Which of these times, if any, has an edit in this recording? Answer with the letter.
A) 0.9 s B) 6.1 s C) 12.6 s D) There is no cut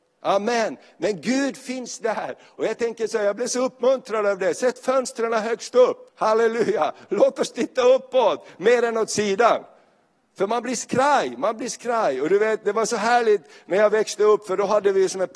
B